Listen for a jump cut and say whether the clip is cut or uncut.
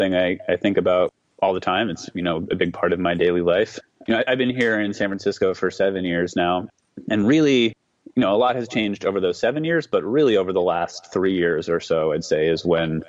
uncut